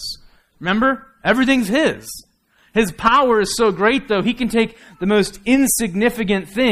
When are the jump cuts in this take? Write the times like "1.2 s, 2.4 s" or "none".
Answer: none

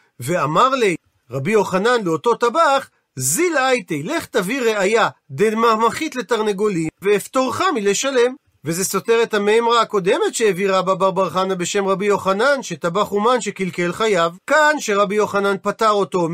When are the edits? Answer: 7.0 s, 14.4 s

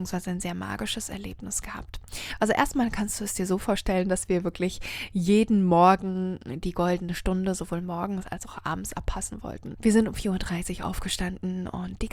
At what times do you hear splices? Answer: 9.7 s

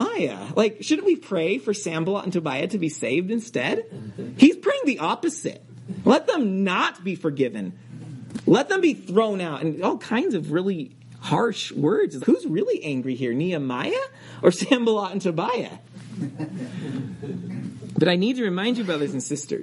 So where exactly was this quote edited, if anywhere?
12.2 s

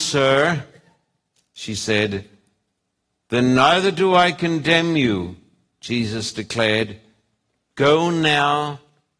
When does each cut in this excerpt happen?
none

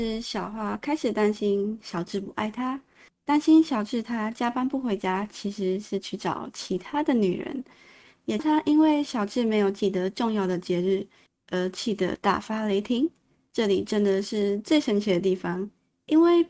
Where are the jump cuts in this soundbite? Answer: 8.4 s

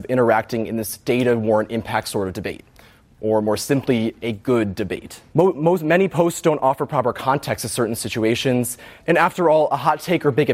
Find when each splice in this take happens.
5.3 s, 9.0 s

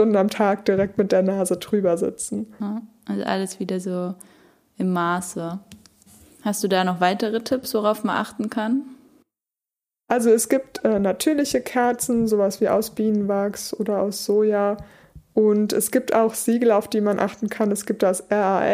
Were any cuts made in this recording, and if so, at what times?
none

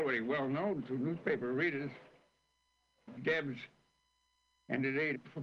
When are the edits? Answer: 3.2 s

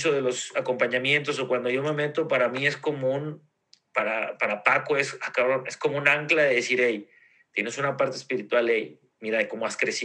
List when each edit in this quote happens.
none

